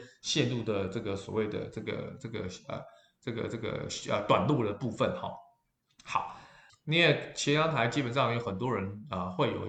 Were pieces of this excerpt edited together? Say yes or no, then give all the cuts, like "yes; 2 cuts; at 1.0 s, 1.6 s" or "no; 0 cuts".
yes; 1 cut; at 6.7 s